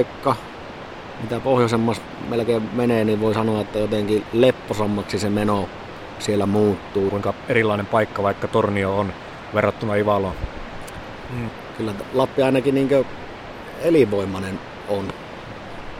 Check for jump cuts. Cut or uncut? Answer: cut